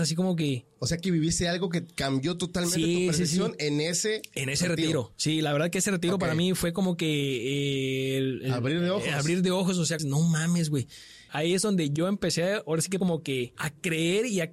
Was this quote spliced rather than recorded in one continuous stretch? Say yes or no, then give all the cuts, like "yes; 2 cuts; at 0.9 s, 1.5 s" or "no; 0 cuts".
yes; 3 cuts; at 10.0 s, 11.3 s, 13.6 s